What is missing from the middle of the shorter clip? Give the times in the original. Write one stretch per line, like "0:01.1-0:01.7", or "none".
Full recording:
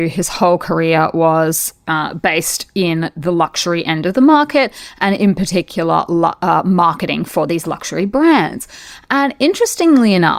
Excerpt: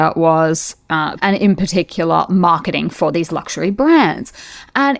0:02.1-0:04.9
0:06.1-0:06.6